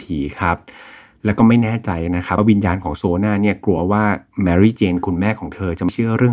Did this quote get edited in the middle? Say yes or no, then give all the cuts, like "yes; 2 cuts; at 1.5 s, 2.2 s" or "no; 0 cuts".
no; 0 cuts